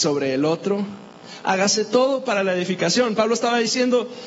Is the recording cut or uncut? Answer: cut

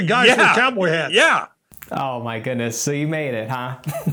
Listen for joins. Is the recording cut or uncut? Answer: uncut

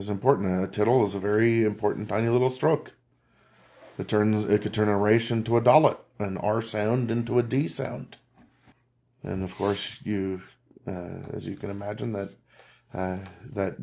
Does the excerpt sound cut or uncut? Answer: uncut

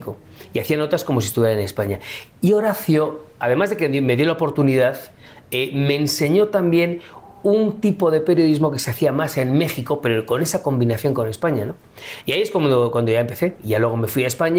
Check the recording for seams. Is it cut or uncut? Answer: uncut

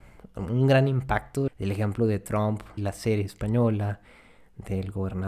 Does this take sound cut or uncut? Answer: cut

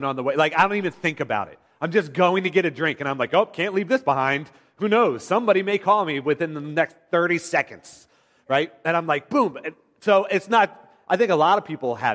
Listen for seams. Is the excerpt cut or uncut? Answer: uncut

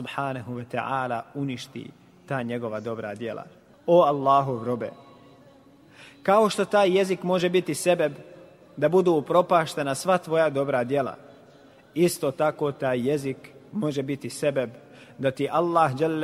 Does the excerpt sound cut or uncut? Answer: cut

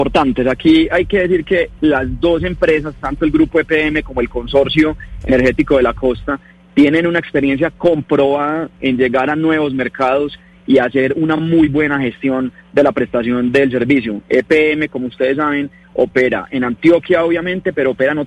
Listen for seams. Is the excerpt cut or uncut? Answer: uncut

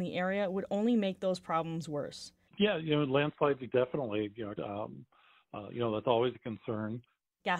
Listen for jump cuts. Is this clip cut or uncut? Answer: cut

